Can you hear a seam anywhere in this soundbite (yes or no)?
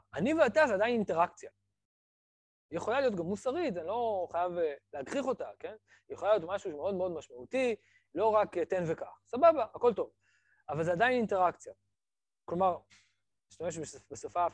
no